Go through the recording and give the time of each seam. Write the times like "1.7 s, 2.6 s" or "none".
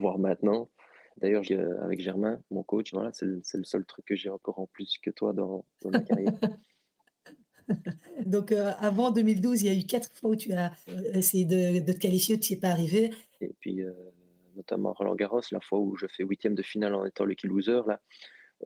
1.4 s, 2.9 s, 13.4 s